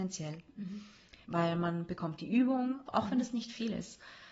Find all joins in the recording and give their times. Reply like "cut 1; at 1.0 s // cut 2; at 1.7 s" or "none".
cut 1; at 1.2 s // cut 2; at 2.9 s